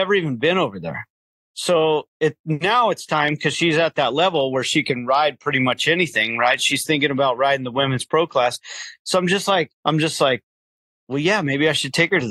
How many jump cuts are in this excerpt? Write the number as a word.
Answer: one